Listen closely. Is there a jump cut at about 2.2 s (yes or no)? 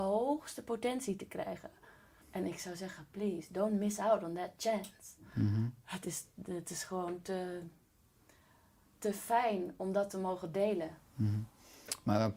yes